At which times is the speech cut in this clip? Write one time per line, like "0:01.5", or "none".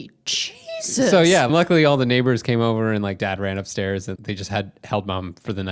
0:01.5
0:04.2